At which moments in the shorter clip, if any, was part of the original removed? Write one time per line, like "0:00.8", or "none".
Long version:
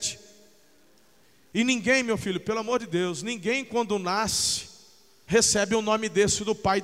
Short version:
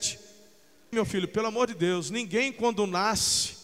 0:00.9